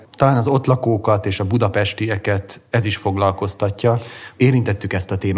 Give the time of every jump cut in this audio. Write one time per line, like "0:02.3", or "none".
0:04.4